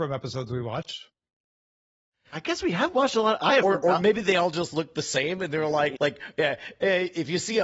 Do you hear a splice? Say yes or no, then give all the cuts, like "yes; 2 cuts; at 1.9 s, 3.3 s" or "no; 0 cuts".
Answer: yes; 1 cut; at 6.0 s